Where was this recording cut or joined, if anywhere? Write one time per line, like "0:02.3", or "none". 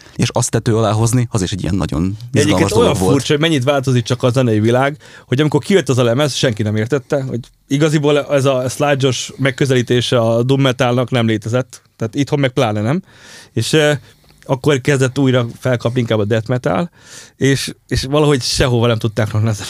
none